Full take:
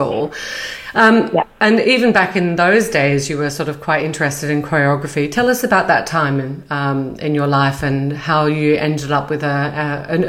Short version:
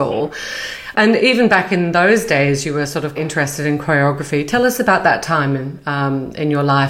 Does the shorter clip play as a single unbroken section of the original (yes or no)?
no